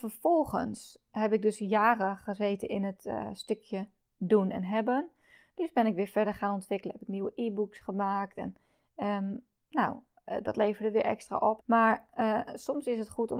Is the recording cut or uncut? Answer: cut